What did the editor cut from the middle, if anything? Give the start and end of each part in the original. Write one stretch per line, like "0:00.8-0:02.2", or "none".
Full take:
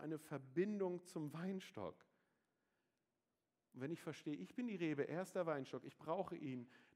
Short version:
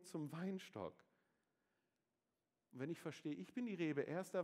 none